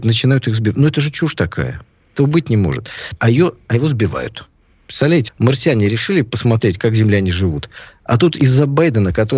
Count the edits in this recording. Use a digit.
2